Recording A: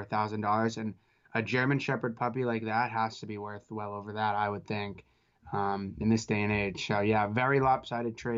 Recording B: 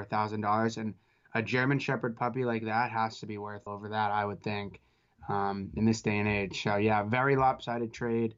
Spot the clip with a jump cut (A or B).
B